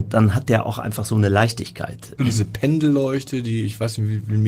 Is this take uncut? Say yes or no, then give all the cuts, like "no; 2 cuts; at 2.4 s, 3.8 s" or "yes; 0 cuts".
no; 1 cut; at 2.2 s